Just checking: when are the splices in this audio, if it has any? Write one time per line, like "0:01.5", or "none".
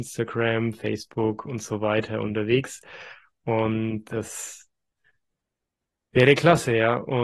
none